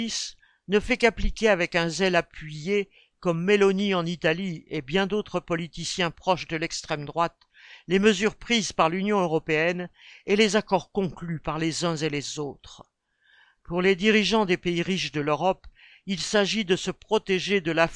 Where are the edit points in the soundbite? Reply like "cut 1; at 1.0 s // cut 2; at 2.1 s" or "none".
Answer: none